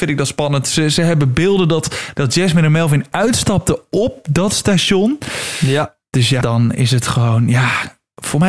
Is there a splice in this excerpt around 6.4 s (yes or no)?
yes